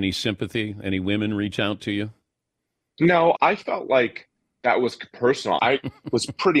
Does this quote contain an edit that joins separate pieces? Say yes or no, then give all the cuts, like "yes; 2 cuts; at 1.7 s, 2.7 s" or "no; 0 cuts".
yes; 2 cuts; at 3.4 s, 5.6 s